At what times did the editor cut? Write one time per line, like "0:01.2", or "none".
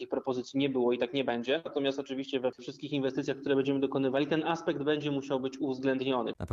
none